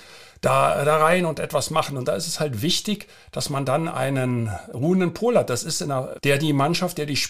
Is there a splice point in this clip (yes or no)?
yes